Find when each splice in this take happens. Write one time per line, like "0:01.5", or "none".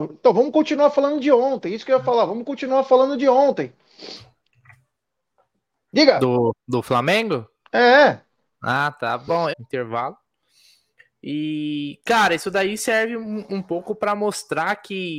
0:09.5